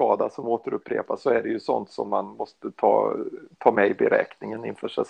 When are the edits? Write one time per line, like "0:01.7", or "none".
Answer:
none